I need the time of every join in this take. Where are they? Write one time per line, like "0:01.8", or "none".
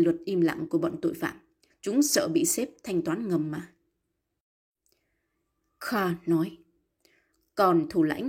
0:01.7